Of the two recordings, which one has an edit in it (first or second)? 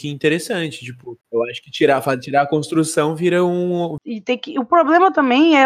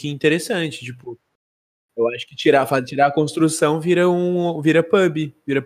first